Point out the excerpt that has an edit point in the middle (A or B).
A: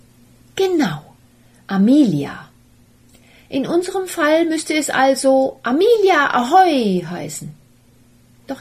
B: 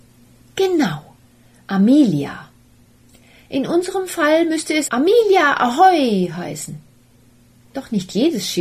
B